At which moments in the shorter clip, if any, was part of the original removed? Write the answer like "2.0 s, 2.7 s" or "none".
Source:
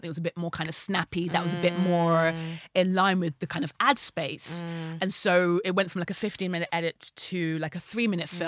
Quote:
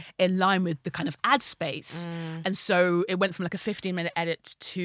none